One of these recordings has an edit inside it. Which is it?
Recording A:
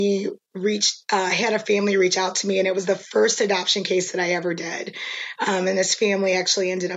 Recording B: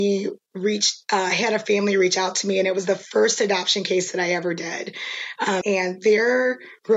B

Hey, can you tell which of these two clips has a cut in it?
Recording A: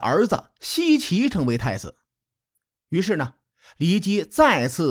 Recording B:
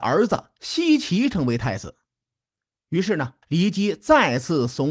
B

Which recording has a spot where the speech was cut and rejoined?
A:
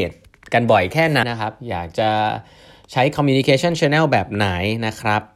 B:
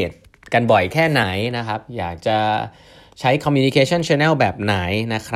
A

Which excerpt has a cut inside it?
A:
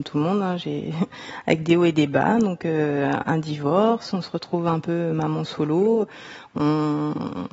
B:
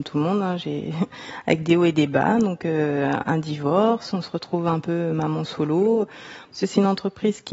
B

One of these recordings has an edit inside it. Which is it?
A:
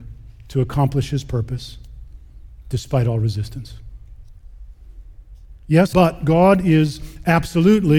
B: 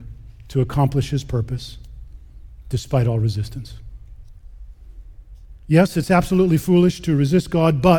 A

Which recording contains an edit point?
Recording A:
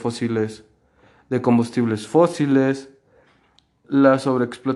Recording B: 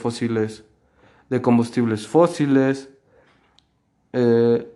A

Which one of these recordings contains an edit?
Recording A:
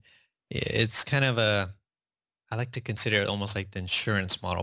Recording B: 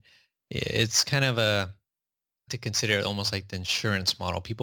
B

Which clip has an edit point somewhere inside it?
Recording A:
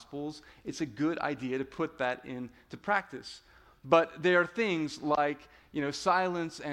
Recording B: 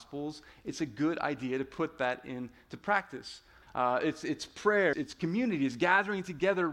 B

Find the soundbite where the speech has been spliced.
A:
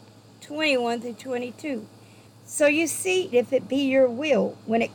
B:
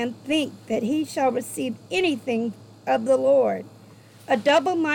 A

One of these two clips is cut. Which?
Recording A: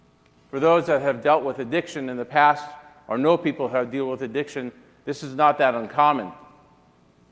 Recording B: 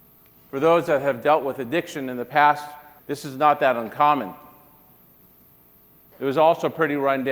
B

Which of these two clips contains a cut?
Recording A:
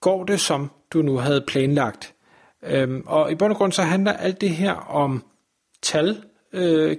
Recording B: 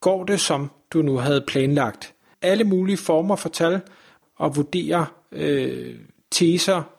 B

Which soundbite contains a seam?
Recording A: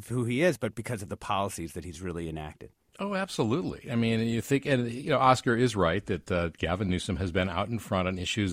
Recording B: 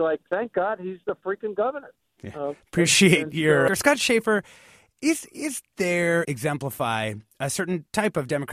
B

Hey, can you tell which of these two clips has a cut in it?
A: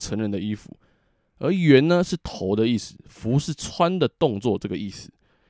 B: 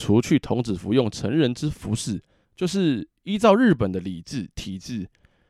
B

